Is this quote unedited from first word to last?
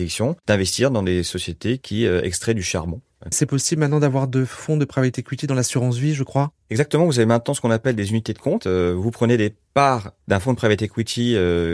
no; 2 cuts; at 3.3 s, 8.6 s

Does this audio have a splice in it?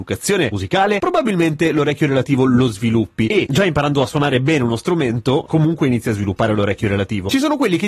yes; 1 cut; at 5.5 s

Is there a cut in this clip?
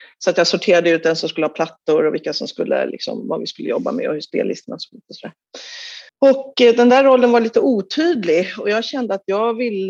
yes; 1 cut; at 6.1 s

